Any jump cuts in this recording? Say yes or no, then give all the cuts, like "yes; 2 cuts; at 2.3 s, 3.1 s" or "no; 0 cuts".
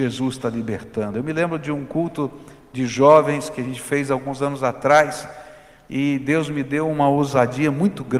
no; 0 cuts